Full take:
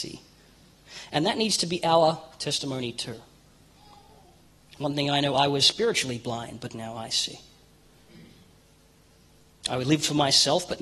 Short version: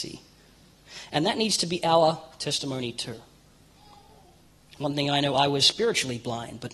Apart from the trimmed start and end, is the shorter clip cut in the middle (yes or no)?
no